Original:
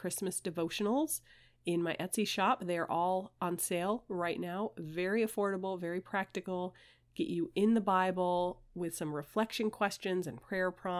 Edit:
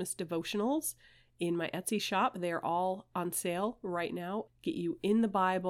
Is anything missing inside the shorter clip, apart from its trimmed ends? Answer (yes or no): yes